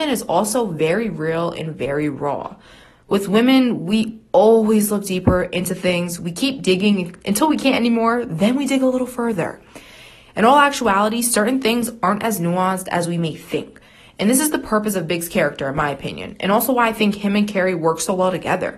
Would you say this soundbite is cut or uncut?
uncut